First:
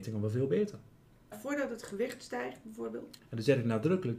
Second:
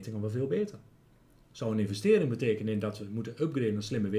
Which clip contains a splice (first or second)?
first